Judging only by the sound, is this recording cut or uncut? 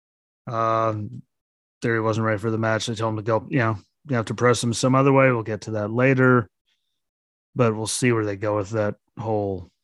uncut